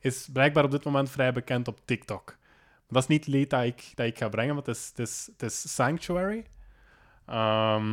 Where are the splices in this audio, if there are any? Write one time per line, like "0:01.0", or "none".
none